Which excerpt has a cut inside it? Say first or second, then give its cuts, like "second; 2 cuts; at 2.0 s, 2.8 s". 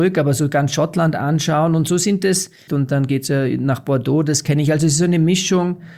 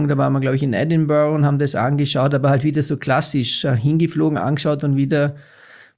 first; 1 cut; at 2.7 s